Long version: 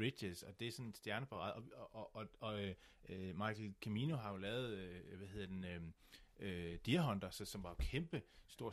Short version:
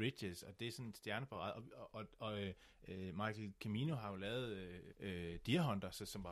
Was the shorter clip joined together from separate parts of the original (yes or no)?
yes